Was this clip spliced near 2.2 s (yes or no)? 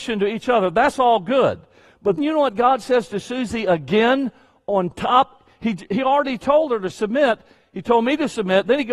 yes